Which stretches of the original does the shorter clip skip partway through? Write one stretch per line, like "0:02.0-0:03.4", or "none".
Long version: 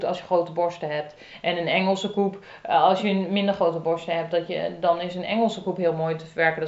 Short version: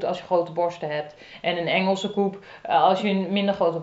none